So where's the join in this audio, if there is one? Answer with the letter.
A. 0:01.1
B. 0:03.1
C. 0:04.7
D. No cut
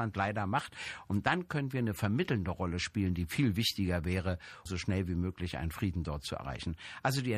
C